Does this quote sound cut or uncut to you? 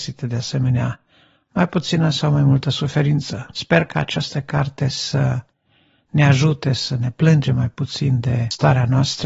cut